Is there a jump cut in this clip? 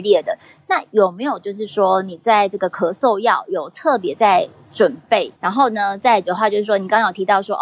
no; 0 cuts

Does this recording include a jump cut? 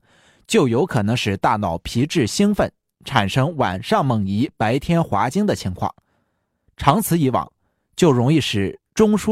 no; 0 cuts

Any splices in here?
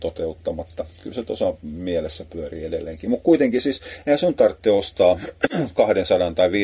no; 0 cuts

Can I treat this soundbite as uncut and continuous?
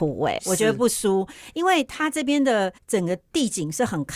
no; 1 cut; at 2.8 s

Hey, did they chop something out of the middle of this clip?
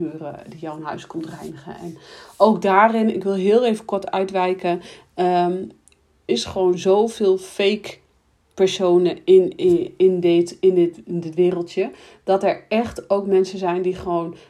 yes; 1 cut; at 6.3 s

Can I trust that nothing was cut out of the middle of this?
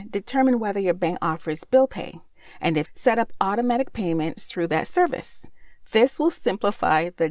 no; 1 cut; at 2.8 s

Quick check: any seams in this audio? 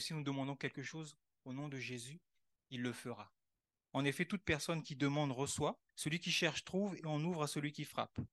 yes; 2 cuts; at 3.9 s, 5.9 s

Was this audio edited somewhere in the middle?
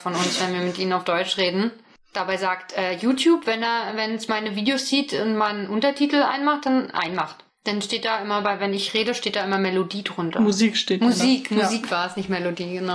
yes; 1 cut; at 7.5 s

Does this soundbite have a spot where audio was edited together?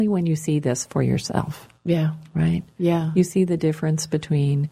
no; 0 cuts

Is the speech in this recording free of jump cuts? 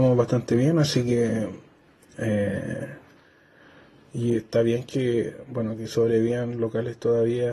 yes; 0 cuts

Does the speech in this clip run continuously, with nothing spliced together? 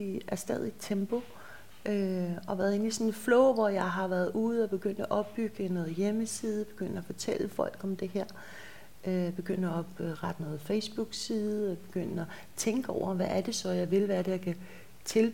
yes; 0 cuts

